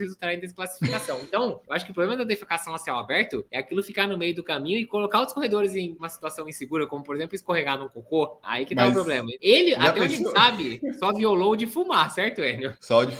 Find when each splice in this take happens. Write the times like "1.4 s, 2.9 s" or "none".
none